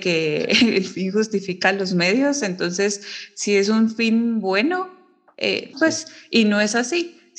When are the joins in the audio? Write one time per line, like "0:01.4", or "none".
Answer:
0:05.7